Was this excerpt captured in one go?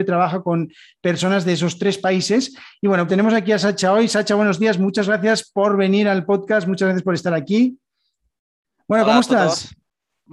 no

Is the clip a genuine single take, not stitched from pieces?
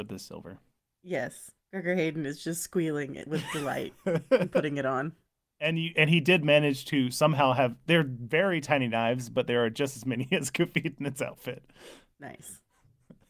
yes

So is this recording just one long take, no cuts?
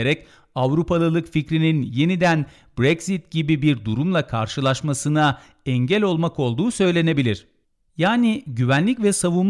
yes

